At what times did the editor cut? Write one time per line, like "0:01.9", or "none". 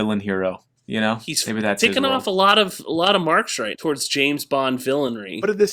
0:03.7